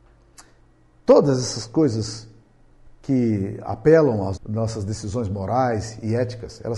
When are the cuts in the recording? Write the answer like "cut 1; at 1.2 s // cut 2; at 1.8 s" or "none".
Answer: cut 1; at 4.4 s